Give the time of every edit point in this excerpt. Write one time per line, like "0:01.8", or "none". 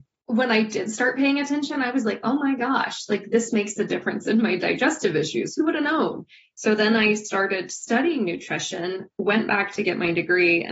none